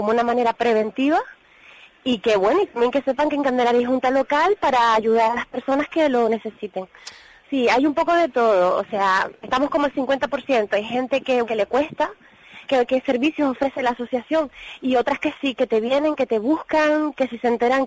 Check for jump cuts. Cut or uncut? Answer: cut